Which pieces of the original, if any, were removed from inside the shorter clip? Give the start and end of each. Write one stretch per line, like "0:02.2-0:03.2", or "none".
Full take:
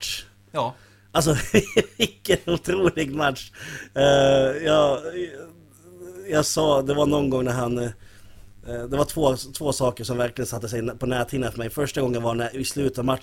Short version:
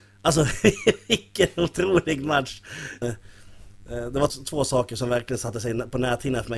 0:03.9-0:07.8
0:09.1-0:09.4